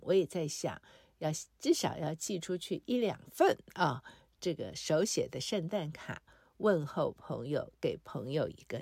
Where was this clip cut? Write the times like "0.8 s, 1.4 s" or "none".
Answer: none

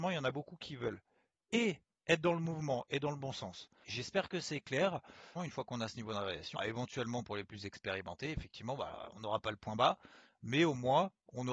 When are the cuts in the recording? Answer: 3.8 s, 5.4 s, 6.6 s

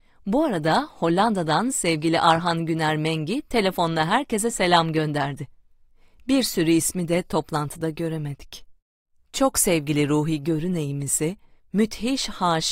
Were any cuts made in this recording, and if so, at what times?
none

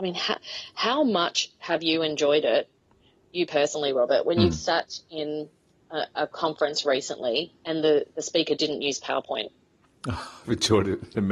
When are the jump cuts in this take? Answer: none

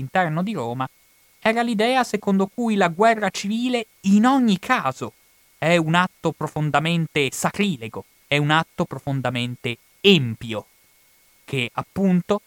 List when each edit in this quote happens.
8.2 s

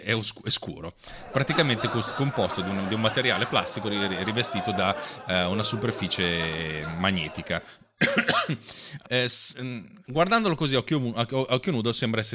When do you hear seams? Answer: 9.0 s

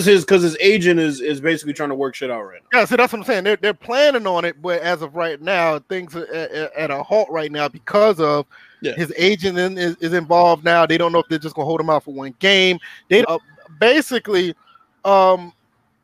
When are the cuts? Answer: 13.2 s

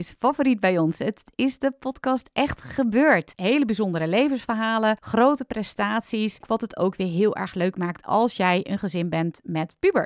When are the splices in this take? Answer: 3.3 s, 6.4 s

